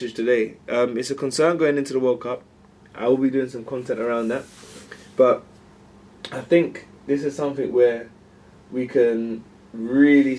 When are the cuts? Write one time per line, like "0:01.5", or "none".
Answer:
none